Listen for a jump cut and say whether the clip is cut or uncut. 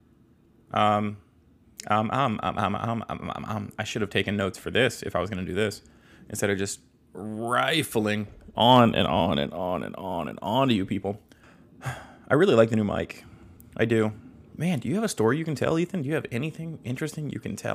uncut